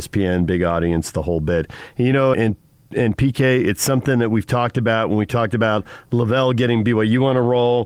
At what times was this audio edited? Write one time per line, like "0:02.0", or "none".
0:02.3

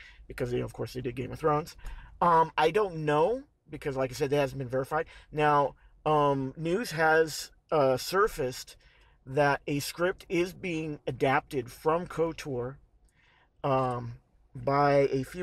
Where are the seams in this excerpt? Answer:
none

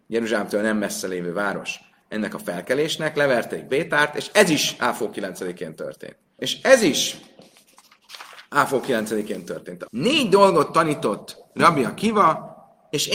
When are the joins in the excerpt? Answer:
0:06.4
0:09.9

